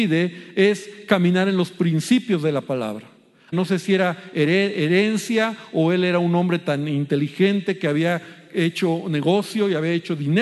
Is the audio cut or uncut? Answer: cut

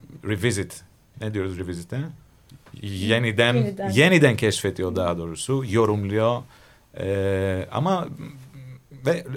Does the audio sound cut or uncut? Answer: uncut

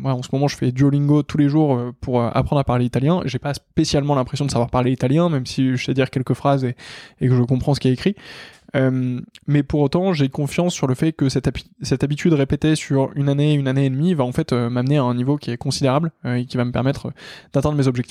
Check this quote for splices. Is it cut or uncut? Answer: uncut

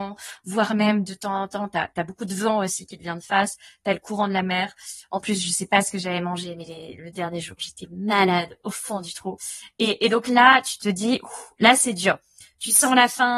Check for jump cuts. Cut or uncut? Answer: uncut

